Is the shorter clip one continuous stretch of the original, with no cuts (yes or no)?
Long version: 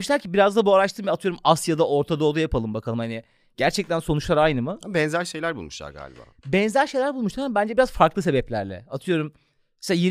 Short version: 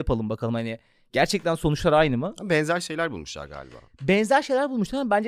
yes